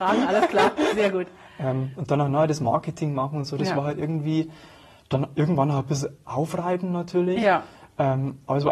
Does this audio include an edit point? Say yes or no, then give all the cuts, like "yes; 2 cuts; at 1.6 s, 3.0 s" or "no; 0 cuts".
no; 0 cuts